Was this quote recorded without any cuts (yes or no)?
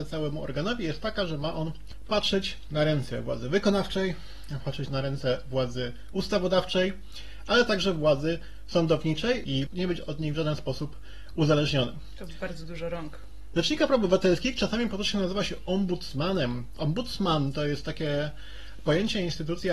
no